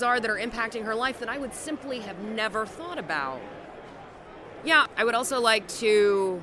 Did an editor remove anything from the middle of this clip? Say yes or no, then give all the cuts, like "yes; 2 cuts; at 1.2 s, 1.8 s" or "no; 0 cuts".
yes; 1 cut; at 4.6 s